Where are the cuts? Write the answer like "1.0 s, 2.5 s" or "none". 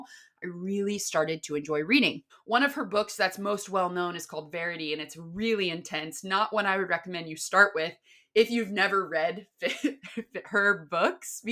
2.3 s